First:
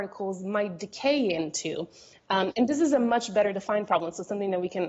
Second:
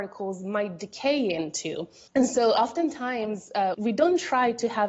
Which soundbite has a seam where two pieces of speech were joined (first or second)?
second